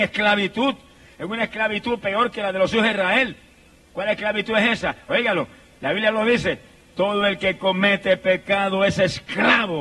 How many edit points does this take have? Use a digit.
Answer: 0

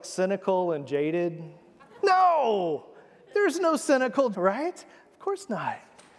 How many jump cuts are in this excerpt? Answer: 2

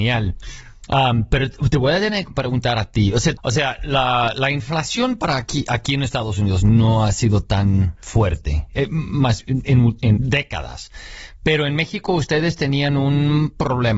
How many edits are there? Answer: 2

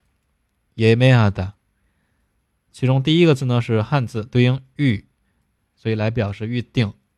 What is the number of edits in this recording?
1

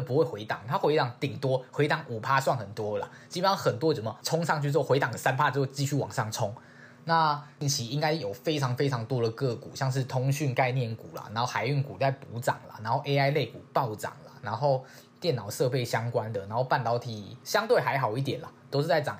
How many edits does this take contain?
0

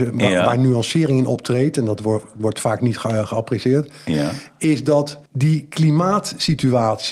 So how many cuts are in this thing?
1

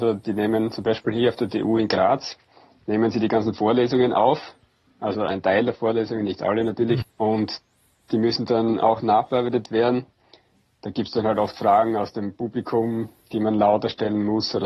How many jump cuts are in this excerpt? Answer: 1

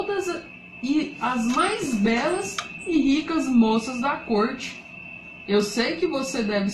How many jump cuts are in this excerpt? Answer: 1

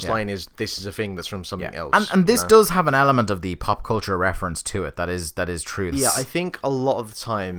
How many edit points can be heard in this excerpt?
1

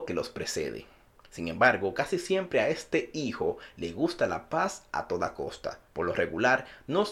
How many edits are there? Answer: 1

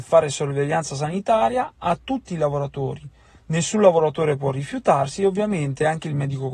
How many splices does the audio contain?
0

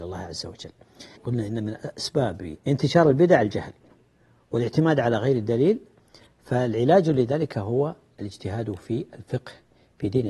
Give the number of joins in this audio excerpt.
2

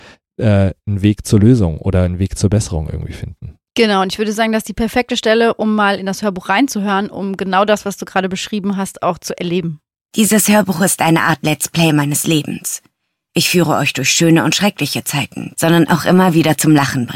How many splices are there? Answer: 1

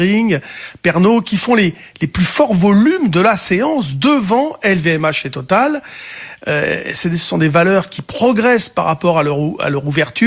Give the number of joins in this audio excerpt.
0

